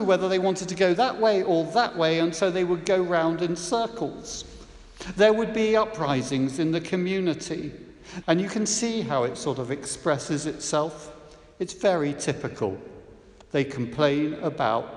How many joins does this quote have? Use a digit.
1